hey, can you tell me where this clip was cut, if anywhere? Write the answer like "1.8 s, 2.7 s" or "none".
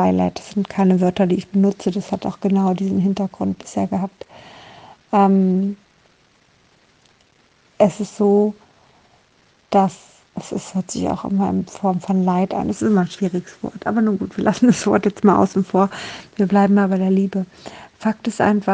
none